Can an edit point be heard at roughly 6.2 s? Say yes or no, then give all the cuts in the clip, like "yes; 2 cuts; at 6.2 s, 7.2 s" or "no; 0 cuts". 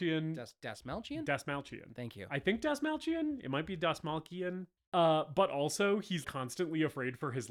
yes; 2 cuts; at 4.8 s, 6.2 s